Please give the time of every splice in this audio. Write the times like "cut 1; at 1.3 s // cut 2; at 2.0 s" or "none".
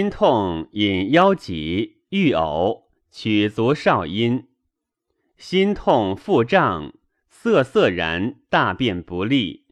none